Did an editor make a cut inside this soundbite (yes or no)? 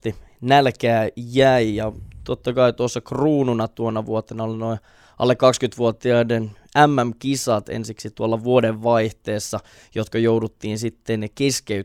no